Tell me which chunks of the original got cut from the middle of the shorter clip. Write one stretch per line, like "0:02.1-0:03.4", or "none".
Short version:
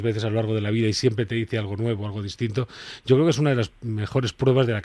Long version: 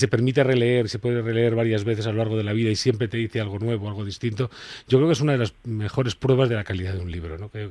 none